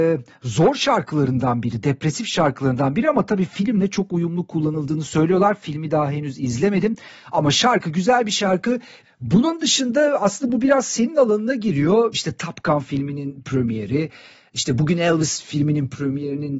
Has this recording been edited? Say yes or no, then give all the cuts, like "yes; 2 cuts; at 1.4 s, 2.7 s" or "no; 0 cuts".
yes; 2 cuts; at 9.0 s, 12.1 s